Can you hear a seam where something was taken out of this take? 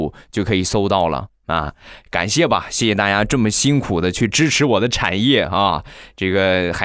no; 0 cuts

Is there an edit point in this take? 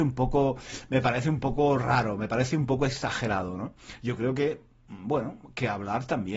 no; 0 cuts

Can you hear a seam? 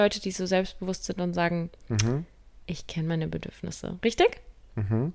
no; 0 cuts

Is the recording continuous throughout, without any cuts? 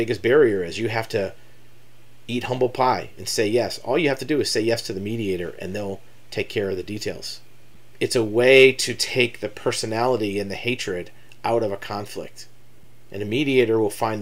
yes; 0 cuts

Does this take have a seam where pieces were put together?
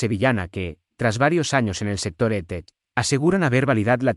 no; 0 cuts

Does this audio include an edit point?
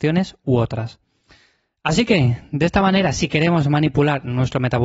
no; 0 cuts

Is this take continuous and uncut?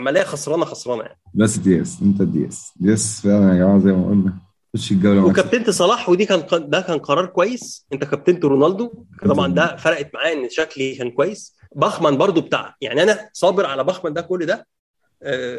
no; 2 cuts; at 1.5 s, 11.6 s

